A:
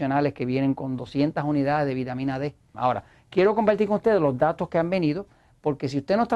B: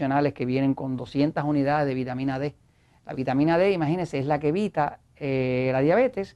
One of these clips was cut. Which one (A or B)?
A